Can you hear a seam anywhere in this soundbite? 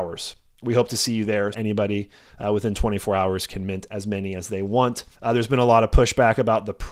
yes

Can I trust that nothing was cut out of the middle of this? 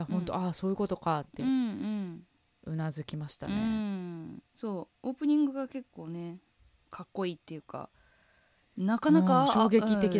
no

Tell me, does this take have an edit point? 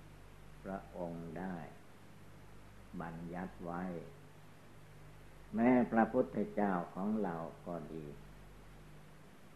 no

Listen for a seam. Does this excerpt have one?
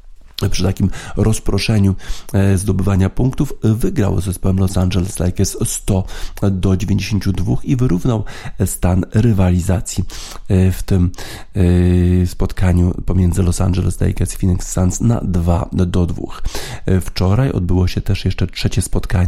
no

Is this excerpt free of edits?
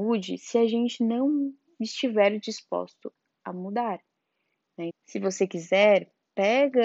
no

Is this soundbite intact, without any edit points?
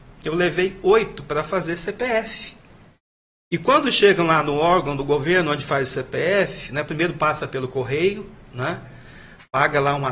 yes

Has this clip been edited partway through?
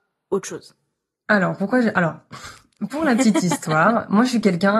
no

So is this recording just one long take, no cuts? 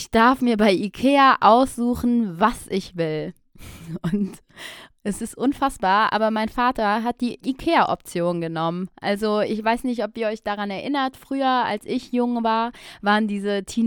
yes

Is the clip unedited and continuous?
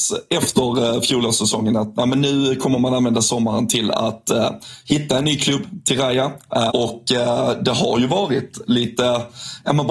no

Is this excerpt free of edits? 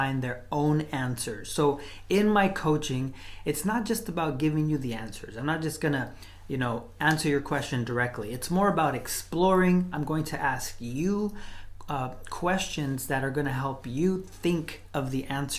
yes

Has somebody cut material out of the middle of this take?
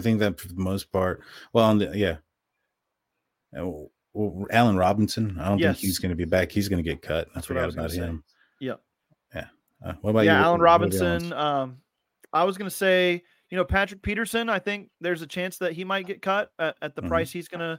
no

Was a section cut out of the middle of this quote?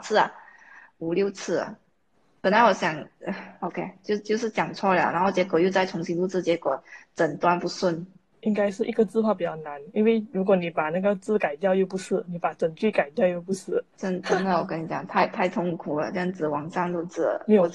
no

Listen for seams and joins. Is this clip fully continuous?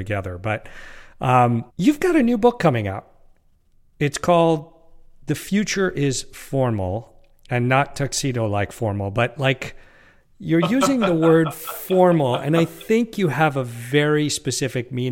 no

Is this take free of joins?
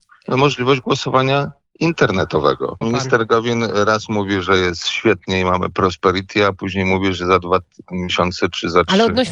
no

